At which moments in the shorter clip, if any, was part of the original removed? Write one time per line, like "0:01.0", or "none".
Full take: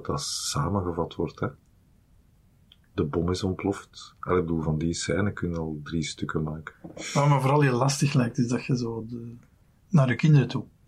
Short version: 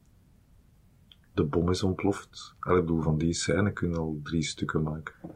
none

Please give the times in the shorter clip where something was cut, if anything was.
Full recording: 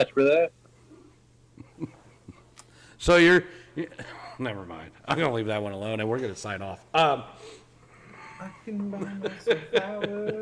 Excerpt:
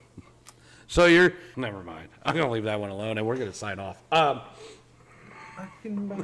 0:01.5

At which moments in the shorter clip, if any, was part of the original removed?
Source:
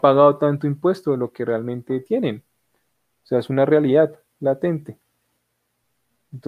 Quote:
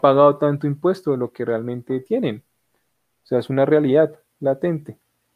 none

